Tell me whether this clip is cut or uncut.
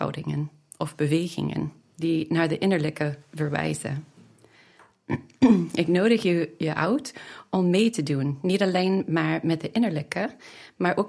uncut